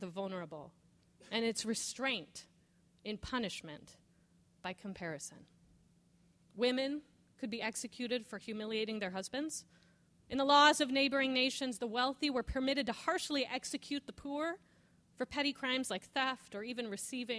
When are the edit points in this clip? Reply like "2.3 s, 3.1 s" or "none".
6.5 s, 10.1 s